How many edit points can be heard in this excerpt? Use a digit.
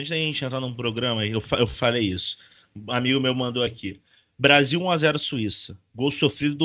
0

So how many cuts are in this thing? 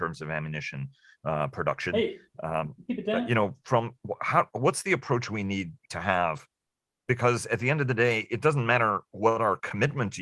0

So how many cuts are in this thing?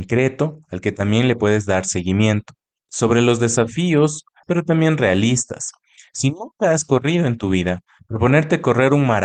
2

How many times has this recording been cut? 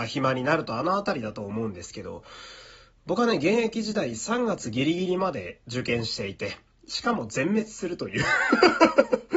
0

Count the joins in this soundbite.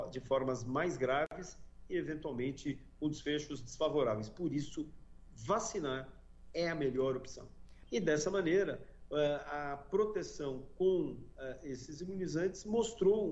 1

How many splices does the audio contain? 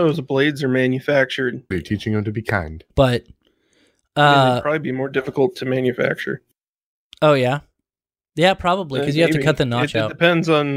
2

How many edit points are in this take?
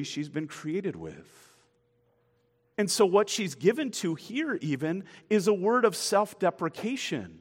1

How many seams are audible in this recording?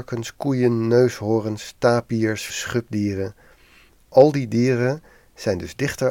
1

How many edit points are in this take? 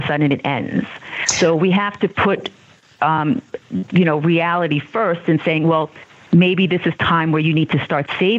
0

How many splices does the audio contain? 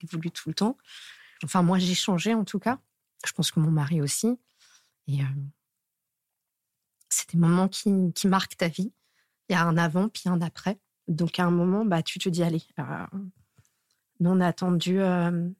2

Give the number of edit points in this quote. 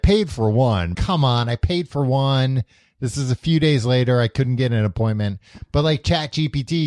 1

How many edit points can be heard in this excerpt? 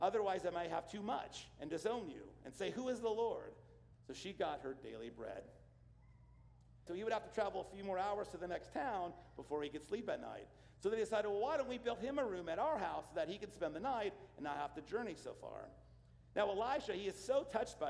2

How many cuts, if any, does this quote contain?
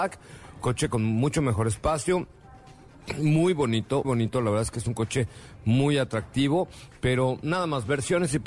1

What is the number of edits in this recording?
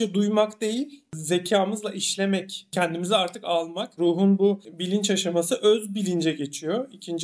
1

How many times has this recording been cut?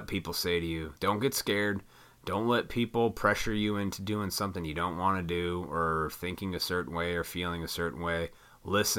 1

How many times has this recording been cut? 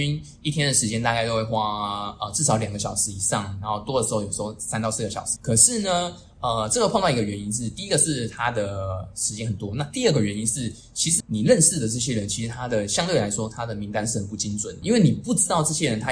3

